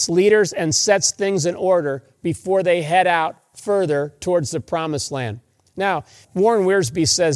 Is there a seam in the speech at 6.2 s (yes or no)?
yes